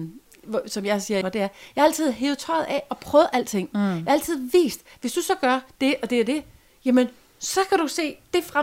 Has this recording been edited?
yes; 1 cut; at 1.2 s

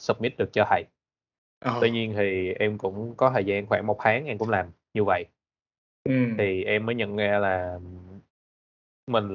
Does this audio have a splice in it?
no; 0 cuts

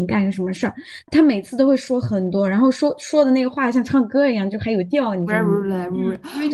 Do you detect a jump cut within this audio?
yes; 1 cut; at 1.1 s

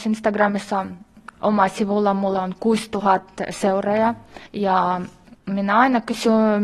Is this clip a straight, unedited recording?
no; 1 cut; at 4.5 s

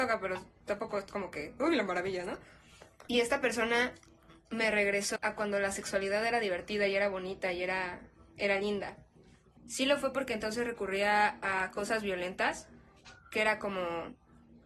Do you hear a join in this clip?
yes; 2 cuts; at 5.2 s, 9.6 s

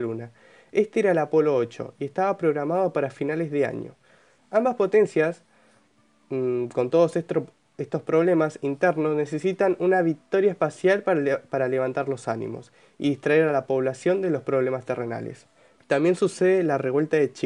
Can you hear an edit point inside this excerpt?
yes; 2 cuts; at 4.4 s, 15.8 s

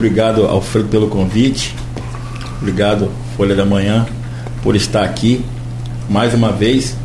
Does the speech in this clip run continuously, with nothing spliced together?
yes; 0 cuts

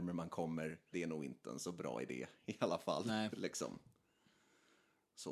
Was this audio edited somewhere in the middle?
yes; 1 cut; at 0.9 s

